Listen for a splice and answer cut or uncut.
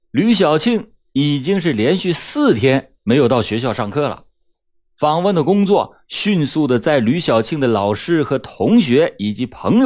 uncut